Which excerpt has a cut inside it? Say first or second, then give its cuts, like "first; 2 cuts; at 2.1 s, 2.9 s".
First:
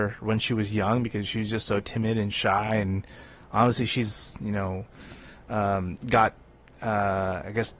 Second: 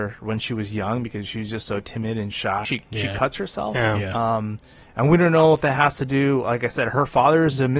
second; 1 cut; at 2.6 s